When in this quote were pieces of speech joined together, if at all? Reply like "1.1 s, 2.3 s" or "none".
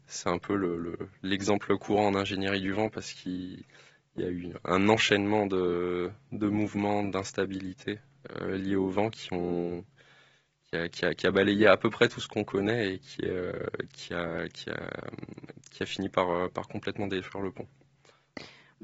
none

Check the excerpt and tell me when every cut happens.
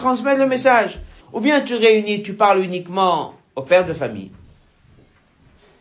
1.2 s

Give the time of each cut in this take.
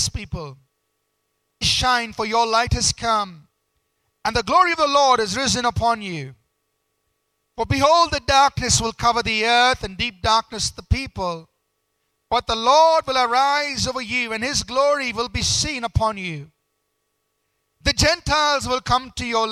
1.6 s

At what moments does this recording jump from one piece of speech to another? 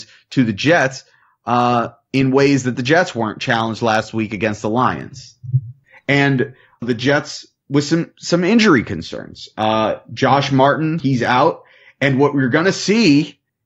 6.8 s, 11.0 s

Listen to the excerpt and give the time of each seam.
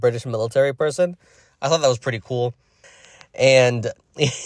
2.8 s

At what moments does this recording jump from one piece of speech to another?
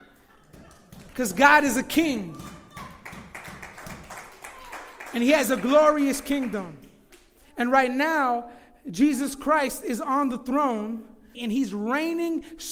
11.3 s

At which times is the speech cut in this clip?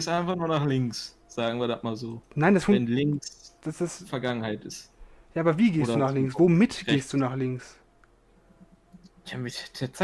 none

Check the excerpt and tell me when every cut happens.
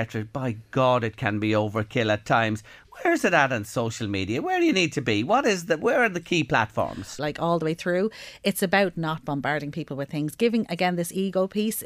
7.2 s

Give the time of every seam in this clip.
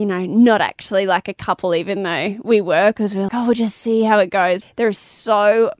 3.3 s, 4.6 s

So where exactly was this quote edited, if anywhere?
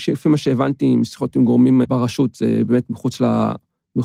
1.8 s

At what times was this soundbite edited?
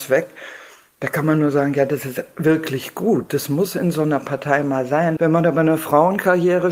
5.2 s

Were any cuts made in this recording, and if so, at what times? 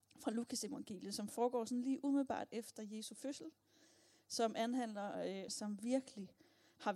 5.5 s

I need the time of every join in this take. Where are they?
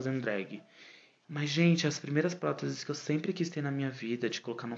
1.2 s

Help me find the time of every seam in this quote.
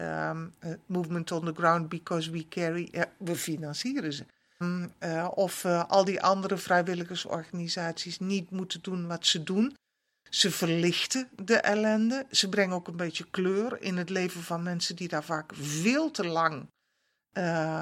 4.6 s

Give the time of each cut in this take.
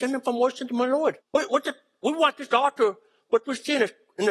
1.2 s

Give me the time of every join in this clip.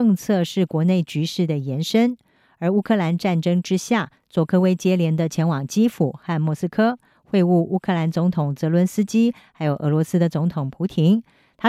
none

